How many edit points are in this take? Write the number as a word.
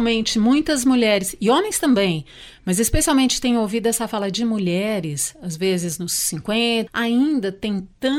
one